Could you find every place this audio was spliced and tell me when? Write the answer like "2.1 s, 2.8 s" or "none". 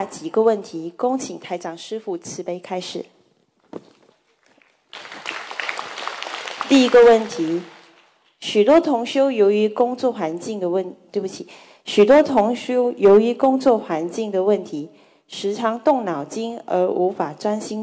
11.1 s